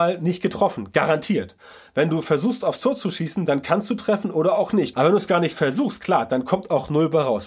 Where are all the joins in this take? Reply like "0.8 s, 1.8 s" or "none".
4.9 s